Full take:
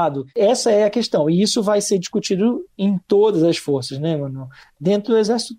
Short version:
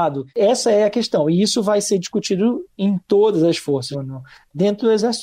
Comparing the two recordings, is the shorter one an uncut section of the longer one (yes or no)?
no